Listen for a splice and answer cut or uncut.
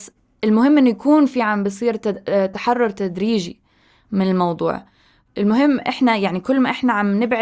uncut